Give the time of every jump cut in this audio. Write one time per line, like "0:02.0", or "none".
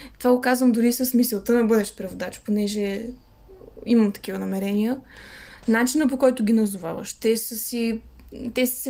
0:05.6